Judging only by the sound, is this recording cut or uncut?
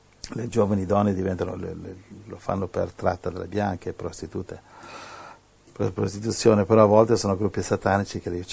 uncut